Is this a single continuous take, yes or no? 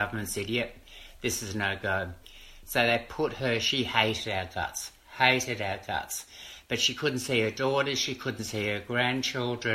yes